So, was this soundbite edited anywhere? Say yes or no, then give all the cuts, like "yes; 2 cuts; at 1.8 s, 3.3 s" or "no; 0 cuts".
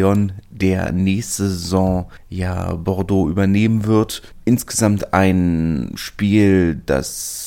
no; 0 cuts